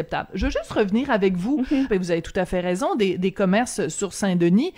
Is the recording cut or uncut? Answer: cut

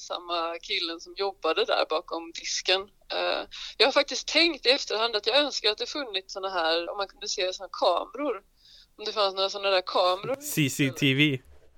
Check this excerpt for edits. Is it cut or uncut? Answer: cut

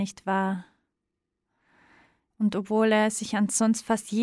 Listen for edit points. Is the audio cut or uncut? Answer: cut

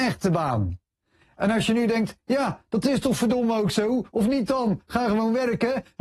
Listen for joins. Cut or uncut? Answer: uncut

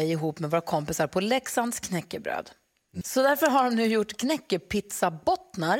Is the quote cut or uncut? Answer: cut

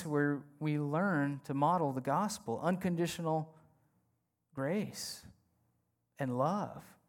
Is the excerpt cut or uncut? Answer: uncut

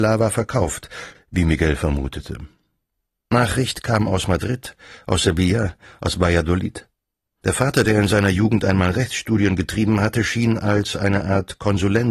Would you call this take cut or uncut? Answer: cut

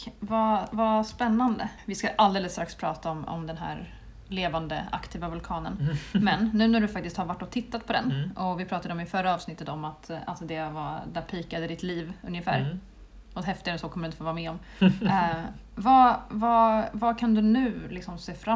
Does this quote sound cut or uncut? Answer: uncut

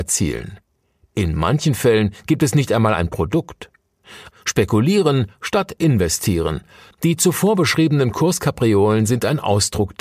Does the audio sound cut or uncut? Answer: cut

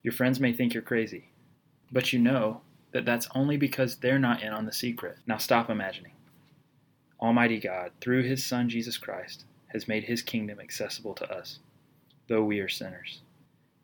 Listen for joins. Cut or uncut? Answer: cut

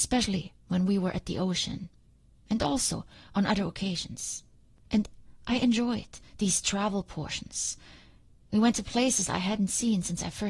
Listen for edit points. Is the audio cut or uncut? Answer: uncut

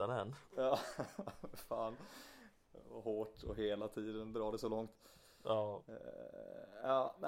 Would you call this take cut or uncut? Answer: uncut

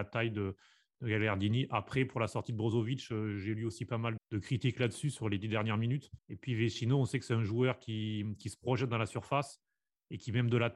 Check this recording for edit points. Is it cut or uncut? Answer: cut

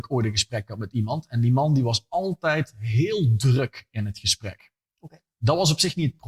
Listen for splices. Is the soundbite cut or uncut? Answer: uncut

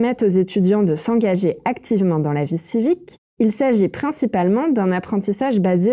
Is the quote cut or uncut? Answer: uncut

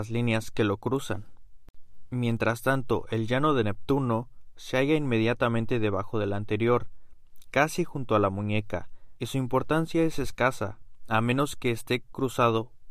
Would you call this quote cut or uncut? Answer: cut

